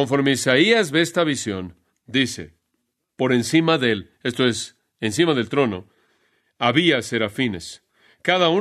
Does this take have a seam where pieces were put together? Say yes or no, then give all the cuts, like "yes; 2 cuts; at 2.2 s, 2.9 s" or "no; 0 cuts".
no; 0 cuts